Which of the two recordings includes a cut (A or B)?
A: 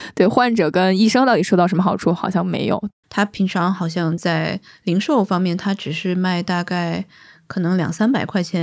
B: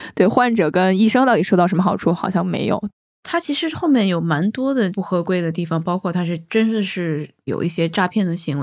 A